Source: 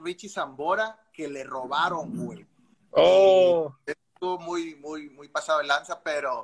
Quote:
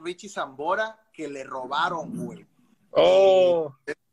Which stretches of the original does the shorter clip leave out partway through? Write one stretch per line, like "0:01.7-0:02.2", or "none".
none